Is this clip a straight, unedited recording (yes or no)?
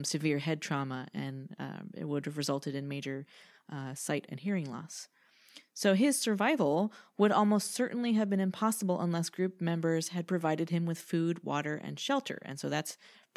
yes